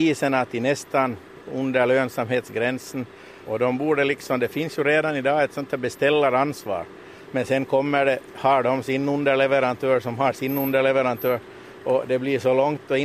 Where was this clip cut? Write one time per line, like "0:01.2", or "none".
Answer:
0:03.5
0:07.3